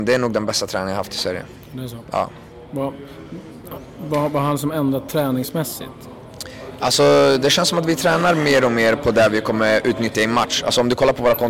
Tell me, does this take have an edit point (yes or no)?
no